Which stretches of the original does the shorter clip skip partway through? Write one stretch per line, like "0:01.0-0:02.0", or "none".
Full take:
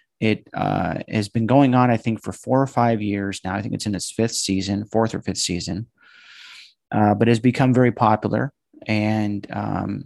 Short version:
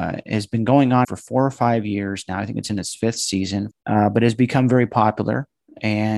0:01.9-0:02.2
0:04.9-0:06.8